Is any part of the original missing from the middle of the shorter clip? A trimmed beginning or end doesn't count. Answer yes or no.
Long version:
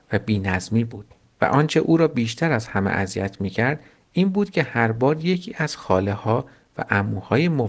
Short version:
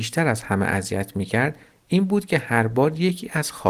no